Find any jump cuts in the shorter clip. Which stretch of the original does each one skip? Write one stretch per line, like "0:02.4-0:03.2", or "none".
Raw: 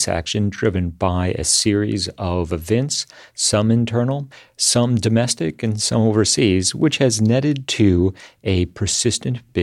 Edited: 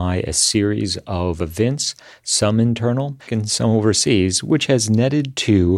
0:04.4-0:05.6